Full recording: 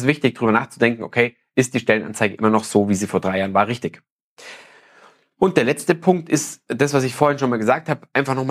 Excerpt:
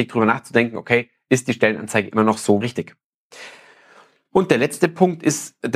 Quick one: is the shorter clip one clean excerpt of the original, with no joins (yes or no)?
no